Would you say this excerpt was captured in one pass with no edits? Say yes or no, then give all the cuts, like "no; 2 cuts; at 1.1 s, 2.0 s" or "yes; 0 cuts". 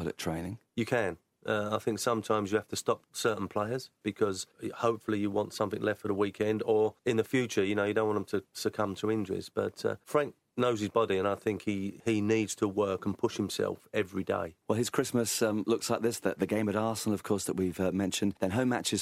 yes; 0 cuts